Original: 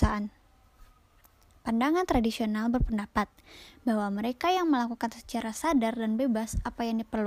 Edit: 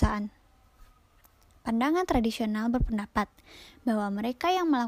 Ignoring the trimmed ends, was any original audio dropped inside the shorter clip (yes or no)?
no